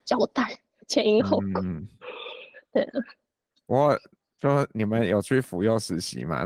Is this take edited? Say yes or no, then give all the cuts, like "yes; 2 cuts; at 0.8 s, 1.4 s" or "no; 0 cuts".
no; 0 cuts